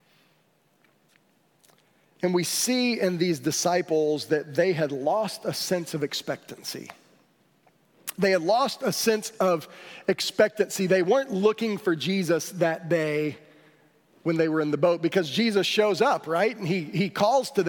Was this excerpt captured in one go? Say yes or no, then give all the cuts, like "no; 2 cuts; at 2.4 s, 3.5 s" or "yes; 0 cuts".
yes; 0 cuts